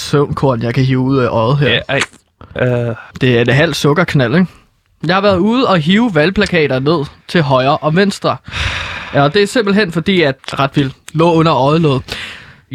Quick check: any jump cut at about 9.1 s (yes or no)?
no